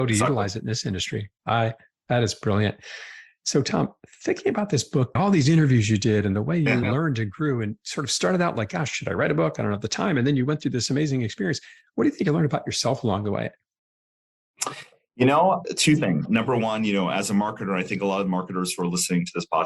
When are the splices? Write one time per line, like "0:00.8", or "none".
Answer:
0:05.2